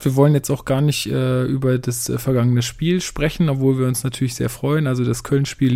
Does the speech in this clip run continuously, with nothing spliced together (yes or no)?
yes